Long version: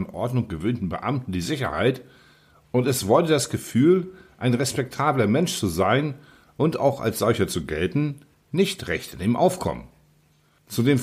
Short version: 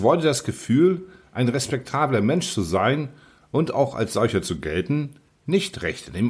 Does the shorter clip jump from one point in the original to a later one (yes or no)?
no